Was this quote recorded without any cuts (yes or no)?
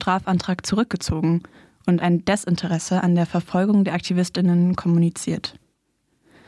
yes